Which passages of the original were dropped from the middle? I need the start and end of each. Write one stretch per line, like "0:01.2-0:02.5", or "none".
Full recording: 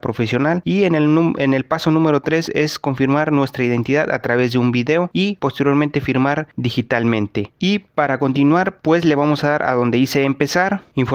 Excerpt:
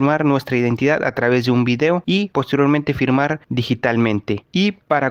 none